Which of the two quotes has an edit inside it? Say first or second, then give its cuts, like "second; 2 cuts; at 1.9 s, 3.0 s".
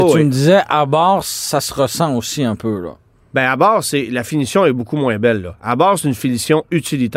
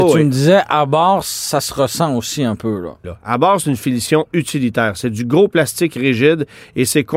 second; 1 cut; at 3.0 s